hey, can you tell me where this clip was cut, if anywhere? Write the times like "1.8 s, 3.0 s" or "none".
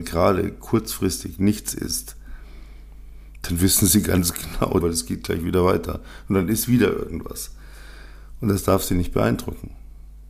4.8 s